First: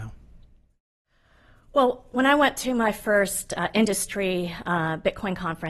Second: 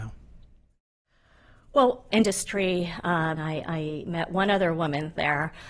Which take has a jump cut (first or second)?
second